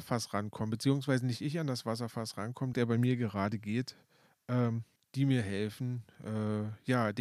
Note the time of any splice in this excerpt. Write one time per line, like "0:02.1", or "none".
0:02.7
0:05.0

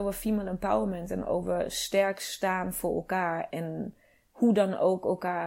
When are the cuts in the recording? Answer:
0:03.5

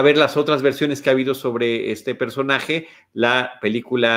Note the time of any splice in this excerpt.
none

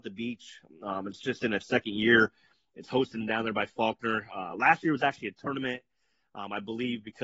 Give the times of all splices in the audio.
none

